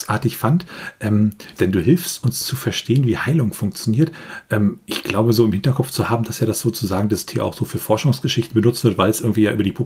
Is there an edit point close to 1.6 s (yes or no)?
yes